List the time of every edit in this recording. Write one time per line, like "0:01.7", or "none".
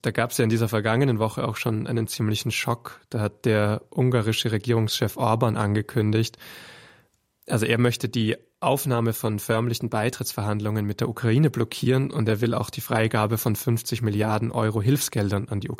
none